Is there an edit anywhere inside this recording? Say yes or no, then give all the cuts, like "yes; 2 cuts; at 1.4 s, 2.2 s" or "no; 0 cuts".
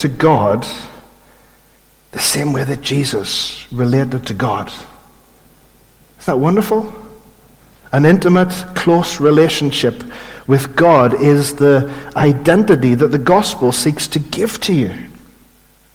no; 0 cuts